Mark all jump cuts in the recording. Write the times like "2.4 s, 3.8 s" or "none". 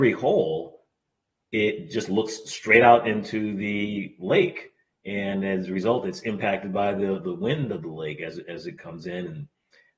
none